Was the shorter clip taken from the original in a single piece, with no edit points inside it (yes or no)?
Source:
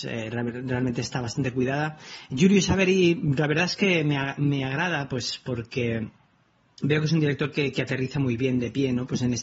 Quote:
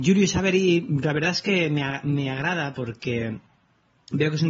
no